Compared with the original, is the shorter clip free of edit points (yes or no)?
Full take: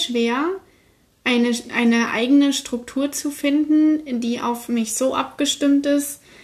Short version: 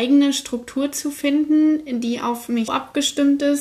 no